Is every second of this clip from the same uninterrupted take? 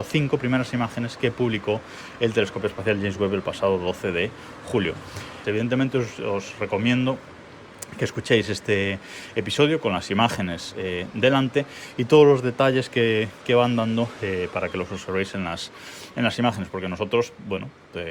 no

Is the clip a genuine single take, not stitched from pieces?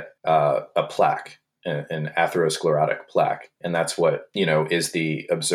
yes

